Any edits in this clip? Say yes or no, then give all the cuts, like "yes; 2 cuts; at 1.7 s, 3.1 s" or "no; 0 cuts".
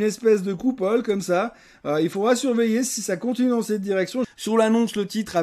yes; 1 cut; at 4.2 s